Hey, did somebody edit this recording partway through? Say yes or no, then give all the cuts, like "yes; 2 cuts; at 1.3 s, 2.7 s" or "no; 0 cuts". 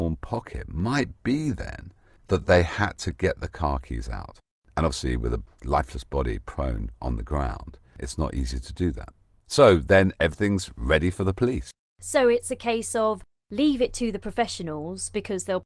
no; 0 cuts